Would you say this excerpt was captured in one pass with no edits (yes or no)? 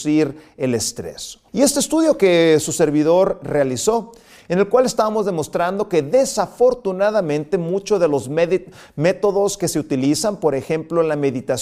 no